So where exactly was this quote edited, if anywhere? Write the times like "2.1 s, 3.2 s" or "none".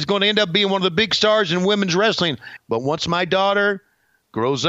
2.6 s